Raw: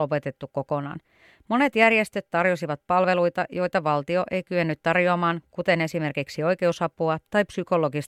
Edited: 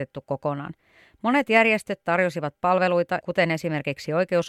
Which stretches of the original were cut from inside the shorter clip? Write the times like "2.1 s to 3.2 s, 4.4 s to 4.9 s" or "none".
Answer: 3.5 s to 5.5 s